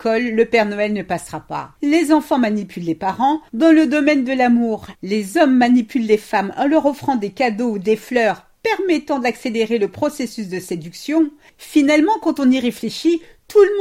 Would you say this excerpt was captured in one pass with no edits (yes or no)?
no